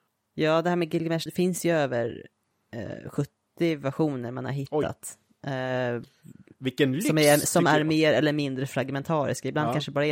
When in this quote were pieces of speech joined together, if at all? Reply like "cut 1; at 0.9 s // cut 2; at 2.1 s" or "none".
cut 1; at 1.3 s